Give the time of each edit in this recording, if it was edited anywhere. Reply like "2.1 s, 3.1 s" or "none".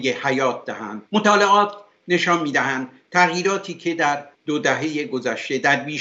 1.1 s, 4.3 s